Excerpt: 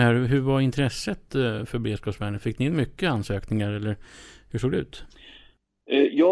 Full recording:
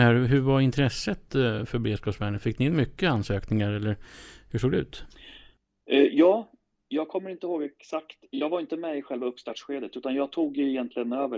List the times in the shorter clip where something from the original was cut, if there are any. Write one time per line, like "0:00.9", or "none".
none